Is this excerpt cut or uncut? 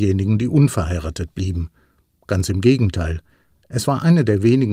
uncut